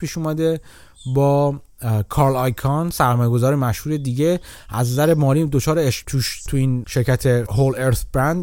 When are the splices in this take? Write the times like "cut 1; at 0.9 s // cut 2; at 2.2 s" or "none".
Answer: cut 1; at 6.0 s